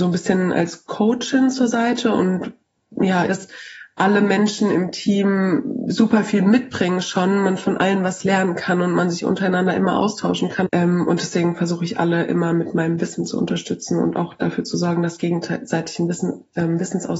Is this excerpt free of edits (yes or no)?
no